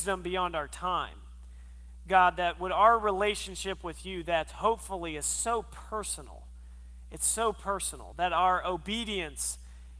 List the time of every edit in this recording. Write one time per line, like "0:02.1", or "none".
none

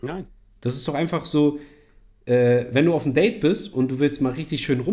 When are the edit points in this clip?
none

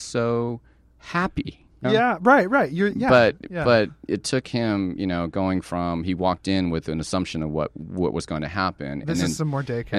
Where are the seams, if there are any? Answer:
0:01.8

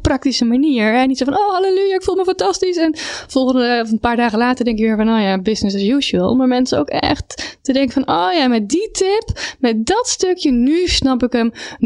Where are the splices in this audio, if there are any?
none

